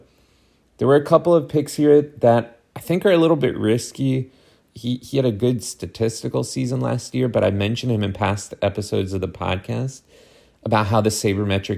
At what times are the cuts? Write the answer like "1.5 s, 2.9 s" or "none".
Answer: 4.7 s